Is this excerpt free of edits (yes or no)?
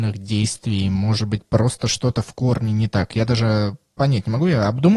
yes